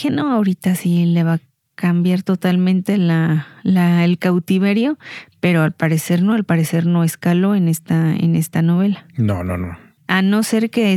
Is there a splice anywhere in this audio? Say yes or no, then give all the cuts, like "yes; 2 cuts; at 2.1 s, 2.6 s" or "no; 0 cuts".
no; 0 cuts